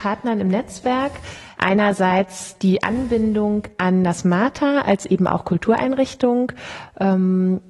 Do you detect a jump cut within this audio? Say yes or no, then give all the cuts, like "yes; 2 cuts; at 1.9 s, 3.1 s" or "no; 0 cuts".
yes; 1 cut; at 1.6 s